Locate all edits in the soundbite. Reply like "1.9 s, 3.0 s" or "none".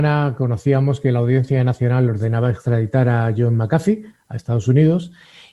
none